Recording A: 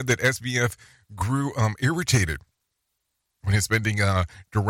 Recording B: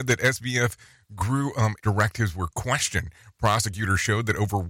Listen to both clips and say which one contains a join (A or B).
B